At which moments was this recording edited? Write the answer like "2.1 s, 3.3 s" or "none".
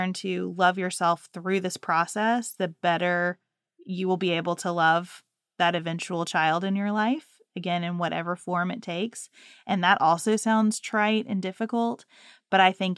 none